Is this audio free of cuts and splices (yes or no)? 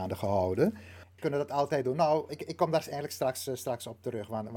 no